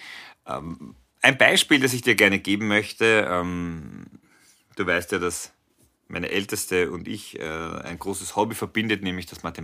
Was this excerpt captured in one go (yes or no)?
yes